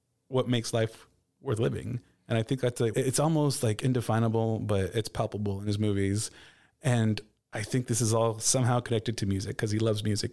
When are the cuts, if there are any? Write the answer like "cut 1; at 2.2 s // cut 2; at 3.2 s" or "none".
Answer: cut 1; at 2.9 s